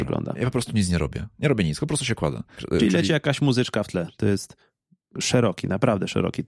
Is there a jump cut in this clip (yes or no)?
yes